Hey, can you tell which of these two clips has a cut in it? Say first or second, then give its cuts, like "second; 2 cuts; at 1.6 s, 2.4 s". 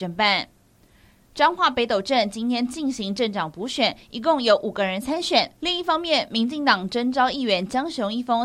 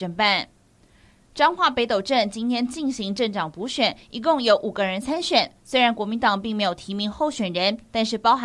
first; 1 cut; at 5.5 s